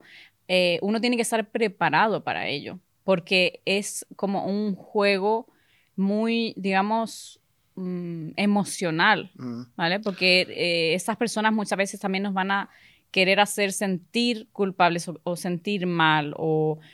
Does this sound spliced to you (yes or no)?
no